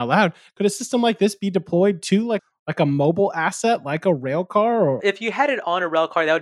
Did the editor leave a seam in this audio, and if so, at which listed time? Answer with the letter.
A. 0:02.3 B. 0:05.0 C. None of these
B